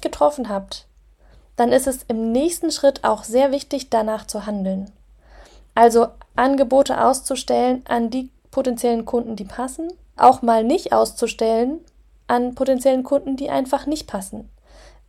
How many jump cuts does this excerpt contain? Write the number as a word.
one